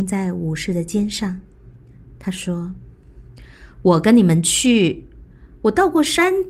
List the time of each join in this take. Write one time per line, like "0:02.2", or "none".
none

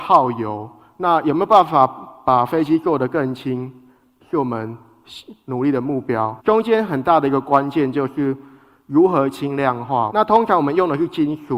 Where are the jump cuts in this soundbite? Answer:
0:06.4
0:10.1

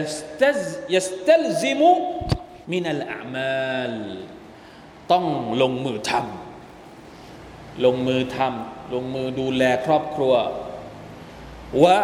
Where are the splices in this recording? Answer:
0:02.6

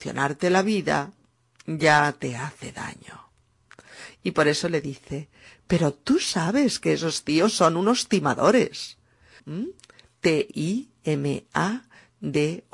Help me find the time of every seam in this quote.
0:09.4

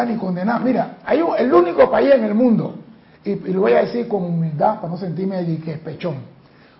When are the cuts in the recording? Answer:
none

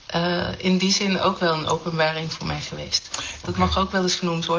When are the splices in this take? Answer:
0:03.4

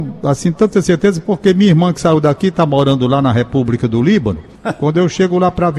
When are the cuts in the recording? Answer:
none

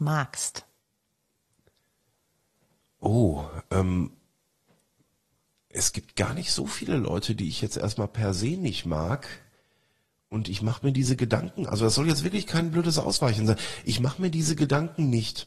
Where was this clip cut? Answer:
none

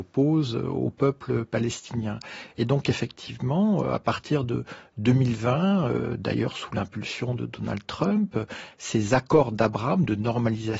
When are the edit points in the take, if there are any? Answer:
none

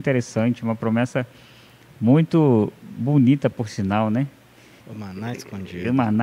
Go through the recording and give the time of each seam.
0:04.8

